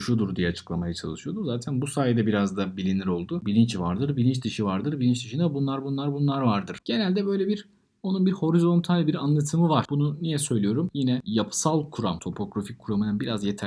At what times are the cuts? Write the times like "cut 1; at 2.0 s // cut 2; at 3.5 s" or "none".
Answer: cut 1; at 6.8 s

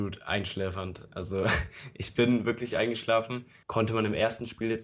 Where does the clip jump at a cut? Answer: cut 1; at 3.6 s

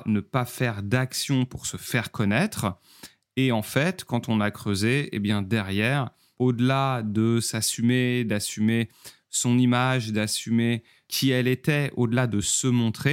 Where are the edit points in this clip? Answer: none

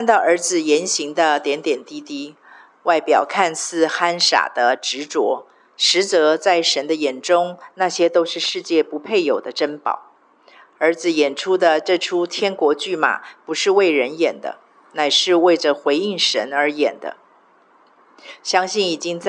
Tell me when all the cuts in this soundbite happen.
none

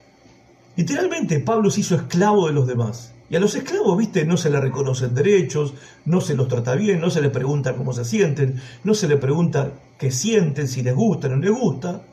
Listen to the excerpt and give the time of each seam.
cut 1; at 3.2 s

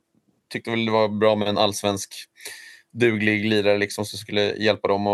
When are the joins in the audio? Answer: none

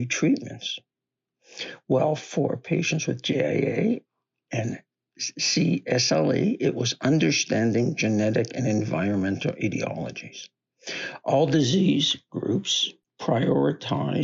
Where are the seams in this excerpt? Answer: none

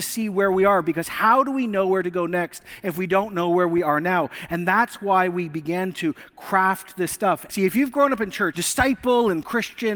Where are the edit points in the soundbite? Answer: cut 1; at 7.5 s // cut 2; at 8.5 s

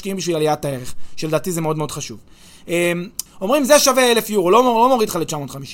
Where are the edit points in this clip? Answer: cut 1; at 3.3 s

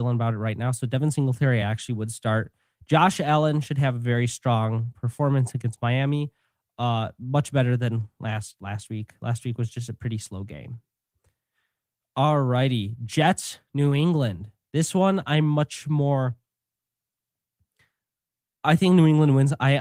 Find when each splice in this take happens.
none

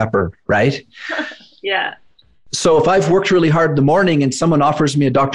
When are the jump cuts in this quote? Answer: none

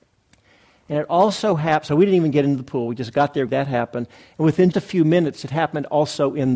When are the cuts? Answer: cut 1; at 3.5 s // cut 2; at 4.7 s

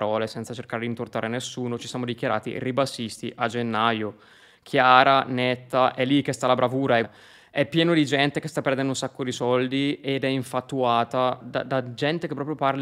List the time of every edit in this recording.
cut 1; at 7.0 s // cut 2; at 11.4 s

